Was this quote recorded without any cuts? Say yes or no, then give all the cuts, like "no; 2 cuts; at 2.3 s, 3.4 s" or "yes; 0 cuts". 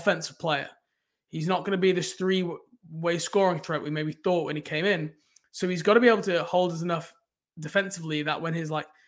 yes; 0 cuts